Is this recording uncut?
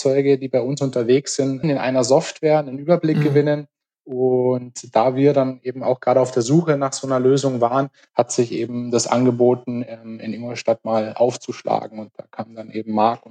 no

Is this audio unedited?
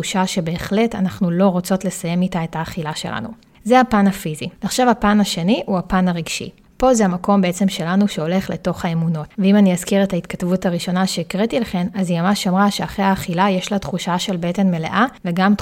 no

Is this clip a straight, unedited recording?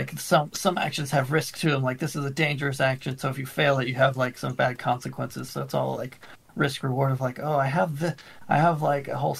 no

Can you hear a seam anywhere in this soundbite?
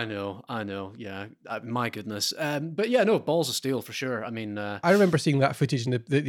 no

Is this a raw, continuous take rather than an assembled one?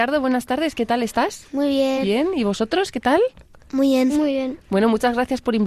yes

